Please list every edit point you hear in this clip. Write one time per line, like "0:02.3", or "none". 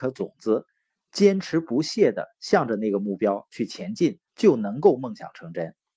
0:00.9
0:04.3